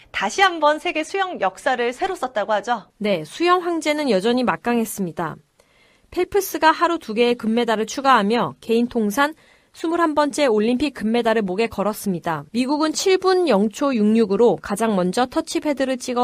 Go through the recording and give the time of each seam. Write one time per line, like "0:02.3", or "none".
0:02.9
0:12.5